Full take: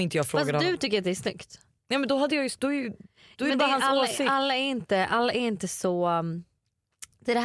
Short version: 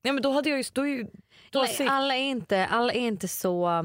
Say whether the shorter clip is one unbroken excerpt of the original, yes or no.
no